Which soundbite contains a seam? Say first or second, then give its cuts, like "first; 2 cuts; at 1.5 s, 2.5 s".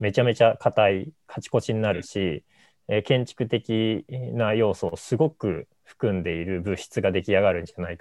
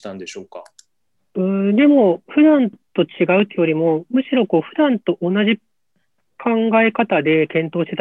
second; 1 cut; at 1.2 s